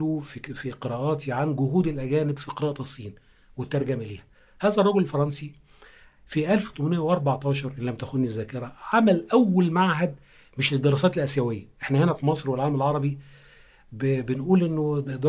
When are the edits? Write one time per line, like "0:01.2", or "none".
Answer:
none